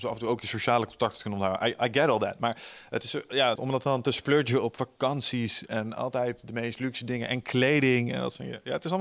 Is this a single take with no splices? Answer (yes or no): no